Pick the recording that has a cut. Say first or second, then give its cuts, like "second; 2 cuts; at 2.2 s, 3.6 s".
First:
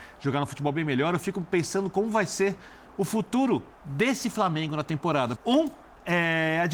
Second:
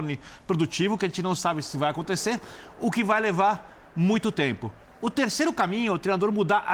first; 2 cuts; at 3.7 s, 5.4 s